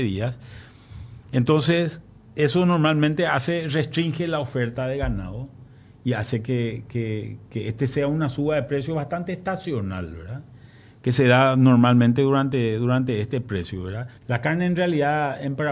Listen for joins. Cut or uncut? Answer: cut